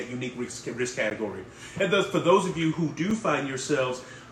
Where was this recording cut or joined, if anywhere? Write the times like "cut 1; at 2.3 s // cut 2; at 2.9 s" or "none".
none